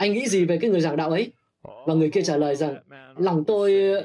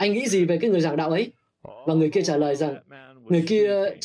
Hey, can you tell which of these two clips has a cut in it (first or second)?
first